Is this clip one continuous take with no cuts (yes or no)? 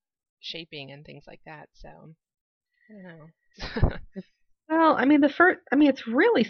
no